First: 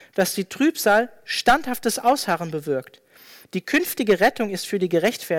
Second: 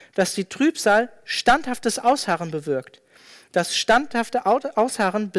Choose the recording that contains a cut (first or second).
first